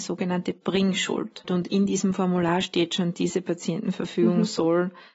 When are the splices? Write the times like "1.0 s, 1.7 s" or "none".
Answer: 1.5 s